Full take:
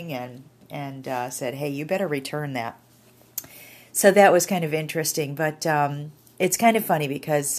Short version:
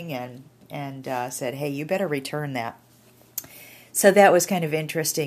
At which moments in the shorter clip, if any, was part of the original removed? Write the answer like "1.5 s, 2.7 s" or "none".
none